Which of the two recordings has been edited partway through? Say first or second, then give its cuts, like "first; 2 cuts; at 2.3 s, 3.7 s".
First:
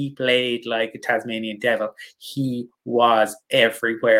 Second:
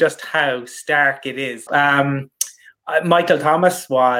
second; 1 cut; at 1.7 s